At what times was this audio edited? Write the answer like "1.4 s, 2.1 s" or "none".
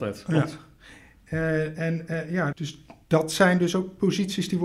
2.5 s